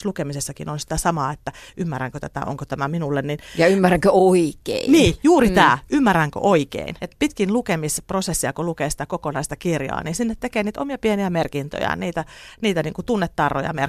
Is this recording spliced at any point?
yes; 1 cut; at 7.0 s

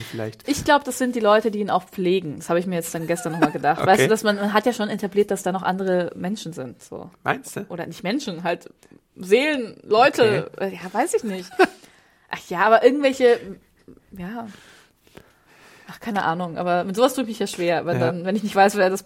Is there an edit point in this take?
no; 0 cuts

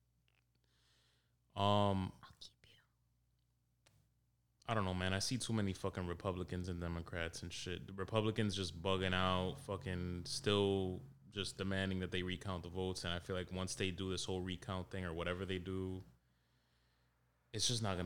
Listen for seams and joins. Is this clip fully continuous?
yes; 0 cuts

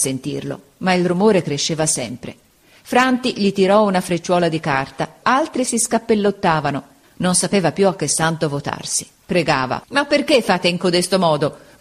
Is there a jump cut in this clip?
yes; 3 cuts; at 5.2 s, 7.0 s, 9.8 s

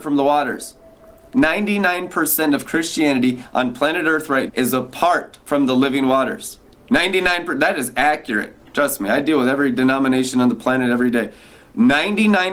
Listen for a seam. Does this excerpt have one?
yes; 1 cut; at 4.5 s

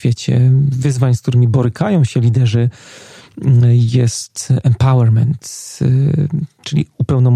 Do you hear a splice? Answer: no; 0 cuts

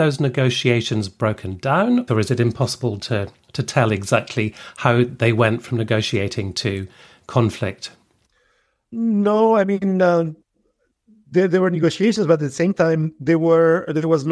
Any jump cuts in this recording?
yes; 1 cut; at 2.1 s

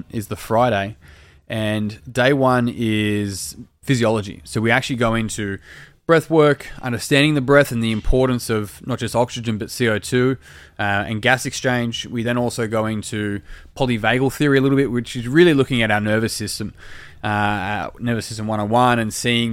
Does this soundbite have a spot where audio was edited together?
no; 0 cuts

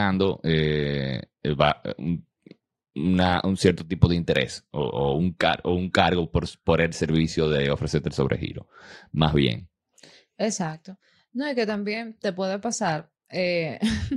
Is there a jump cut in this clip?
no; 0 cuts

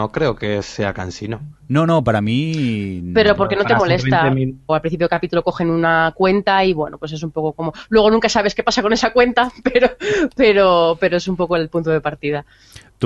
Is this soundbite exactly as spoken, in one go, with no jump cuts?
no; 1 cut; at 4.7 s

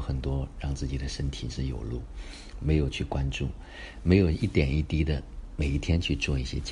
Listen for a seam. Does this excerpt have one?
no; 0 cuts

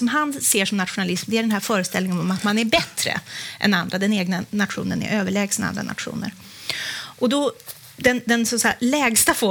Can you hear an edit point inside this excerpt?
no; 0 cuts

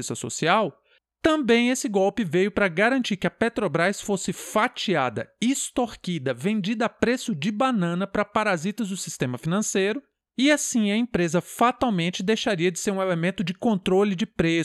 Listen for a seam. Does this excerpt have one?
no; 0 cuts

